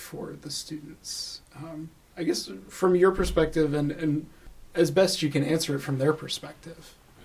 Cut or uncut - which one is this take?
uncut